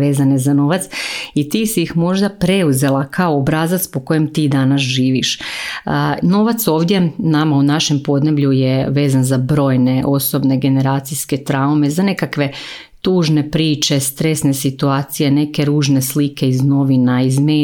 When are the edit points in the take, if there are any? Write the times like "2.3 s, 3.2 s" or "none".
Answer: 6.2 s